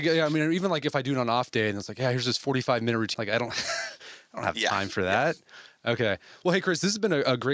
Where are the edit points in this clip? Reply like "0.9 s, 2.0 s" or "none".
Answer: 3.1 s, 6.4 s